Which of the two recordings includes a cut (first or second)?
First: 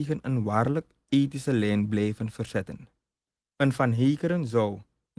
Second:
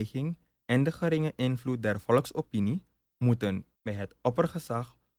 second